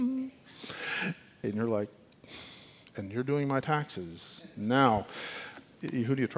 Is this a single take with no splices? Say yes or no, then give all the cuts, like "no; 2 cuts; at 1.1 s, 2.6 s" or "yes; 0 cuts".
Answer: no; 1 cut; at 1.4 s